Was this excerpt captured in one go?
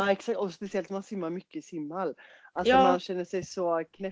yes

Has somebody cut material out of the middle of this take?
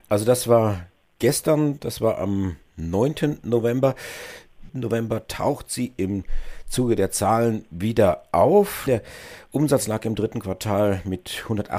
yes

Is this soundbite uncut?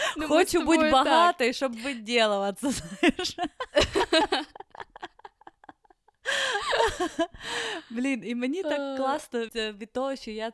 no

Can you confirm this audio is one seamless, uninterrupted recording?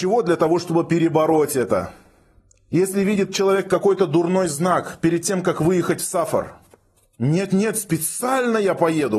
yes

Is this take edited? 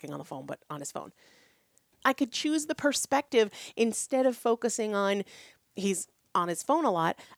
yes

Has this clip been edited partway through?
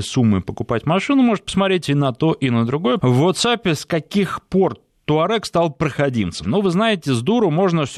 yes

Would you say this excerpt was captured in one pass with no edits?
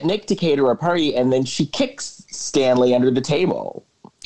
yes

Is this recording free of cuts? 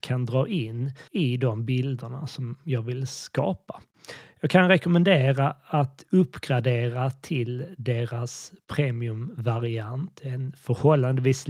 no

